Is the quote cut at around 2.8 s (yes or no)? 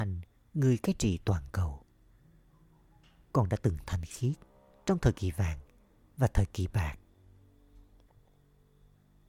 no